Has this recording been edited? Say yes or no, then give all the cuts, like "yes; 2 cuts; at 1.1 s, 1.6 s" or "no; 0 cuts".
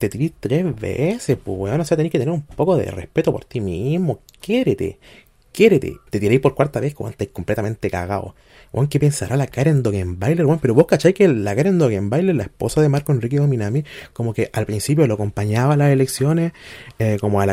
yes; 1 cut; at 6.1 s